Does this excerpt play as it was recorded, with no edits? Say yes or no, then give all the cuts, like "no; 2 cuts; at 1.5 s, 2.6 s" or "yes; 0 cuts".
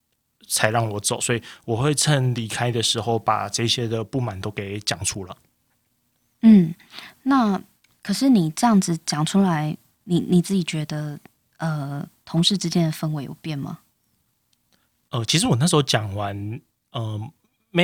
yes; 0 cuts